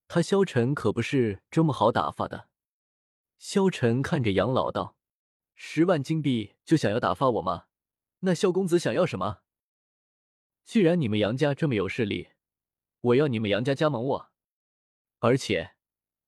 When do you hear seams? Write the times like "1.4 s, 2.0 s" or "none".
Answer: 8.2 s